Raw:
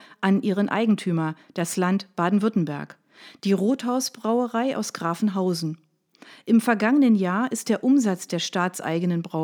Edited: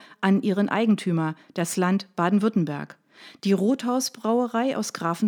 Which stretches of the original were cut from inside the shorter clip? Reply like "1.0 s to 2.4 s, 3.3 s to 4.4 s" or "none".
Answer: none